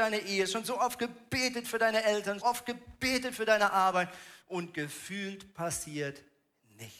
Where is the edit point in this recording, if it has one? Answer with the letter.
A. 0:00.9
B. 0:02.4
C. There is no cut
B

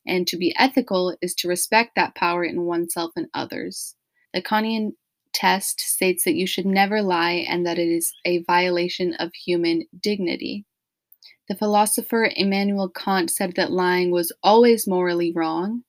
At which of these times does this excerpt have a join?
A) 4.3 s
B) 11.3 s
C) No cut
A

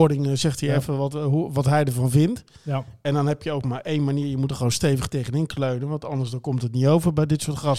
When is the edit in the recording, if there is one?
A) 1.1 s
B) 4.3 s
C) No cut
C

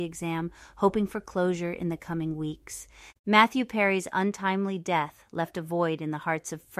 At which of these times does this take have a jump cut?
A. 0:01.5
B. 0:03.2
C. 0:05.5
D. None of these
B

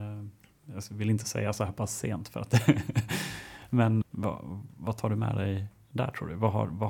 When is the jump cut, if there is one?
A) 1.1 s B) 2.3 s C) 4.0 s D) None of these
C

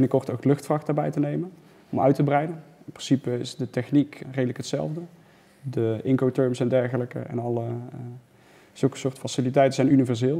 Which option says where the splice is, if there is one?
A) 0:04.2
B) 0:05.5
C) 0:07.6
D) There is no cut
A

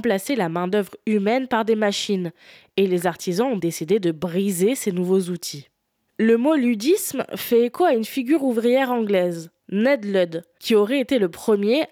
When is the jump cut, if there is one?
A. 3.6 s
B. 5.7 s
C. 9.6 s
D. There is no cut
A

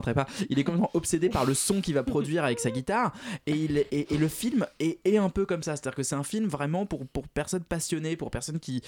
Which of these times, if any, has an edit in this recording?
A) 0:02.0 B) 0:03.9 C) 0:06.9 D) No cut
B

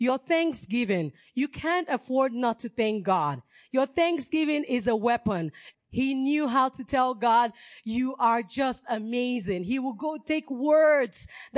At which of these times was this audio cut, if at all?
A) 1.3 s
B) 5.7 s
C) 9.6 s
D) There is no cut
B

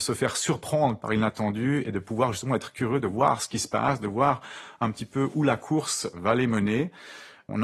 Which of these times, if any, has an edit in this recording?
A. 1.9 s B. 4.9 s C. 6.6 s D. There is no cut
D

